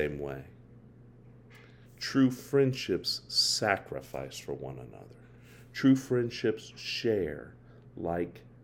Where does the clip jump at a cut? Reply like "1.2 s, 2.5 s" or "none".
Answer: 1.8 s